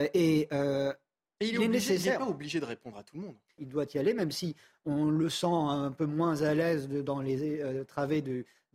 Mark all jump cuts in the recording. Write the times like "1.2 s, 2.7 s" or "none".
3.6 s